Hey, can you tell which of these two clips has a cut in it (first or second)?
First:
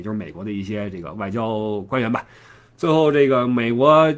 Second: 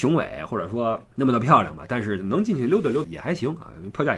second